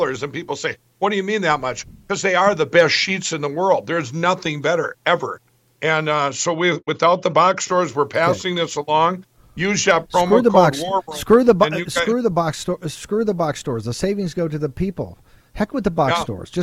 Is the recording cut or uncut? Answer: uncut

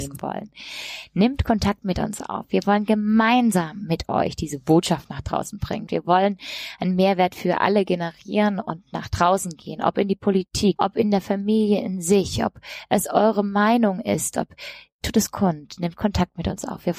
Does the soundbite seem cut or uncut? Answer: cut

